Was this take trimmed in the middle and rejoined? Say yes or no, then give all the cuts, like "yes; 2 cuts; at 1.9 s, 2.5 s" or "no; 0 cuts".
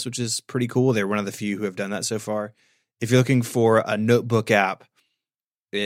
no; 0 cuts